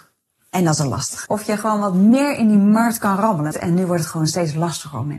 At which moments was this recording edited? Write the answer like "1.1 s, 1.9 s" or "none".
1.3 s, 3.5 s